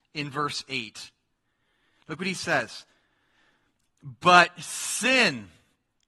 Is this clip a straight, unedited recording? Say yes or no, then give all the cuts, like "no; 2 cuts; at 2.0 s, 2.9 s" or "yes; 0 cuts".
yes; 0 cuts